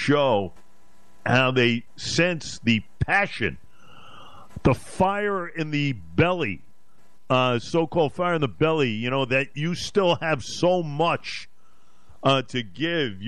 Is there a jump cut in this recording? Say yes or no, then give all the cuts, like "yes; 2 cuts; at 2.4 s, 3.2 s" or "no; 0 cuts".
no; 0 cuts